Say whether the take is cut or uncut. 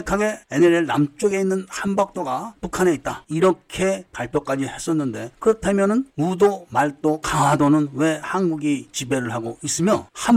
cut